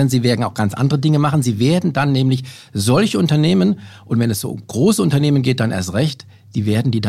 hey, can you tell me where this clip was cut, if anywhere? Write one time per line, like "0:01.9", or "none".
none